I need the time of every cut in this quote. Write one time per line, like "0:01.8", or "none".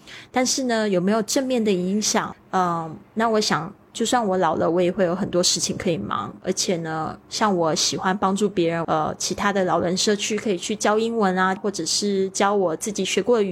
0:02.3
0:08.8
0:11.6